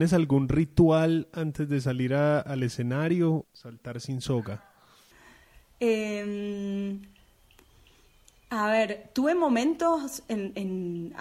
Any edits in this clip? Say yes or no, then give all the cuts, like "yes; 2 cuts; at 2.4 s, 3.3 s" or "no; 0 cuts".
yes; 1 cut; at 3.4 s